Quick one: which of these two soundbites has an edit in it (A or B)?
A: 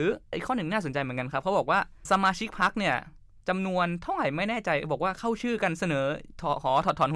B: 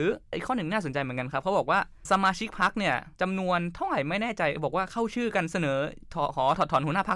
B